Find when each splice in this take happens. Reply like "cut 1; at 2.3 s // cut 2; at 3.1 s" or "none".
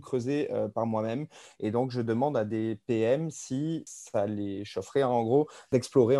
none